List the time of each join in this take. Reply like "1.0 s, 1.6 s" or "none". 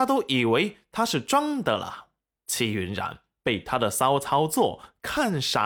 2.4 s